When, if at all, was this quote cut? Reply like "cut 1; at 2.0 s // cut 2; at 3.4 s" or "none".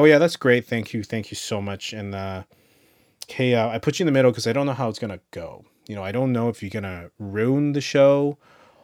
cut 1; at 3.3 s